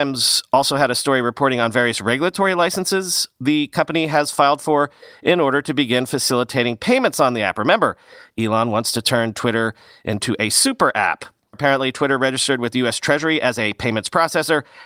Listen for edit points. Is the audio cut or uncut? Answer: cut